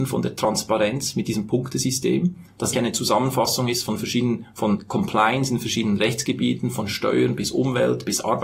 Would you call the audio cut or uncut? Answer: cut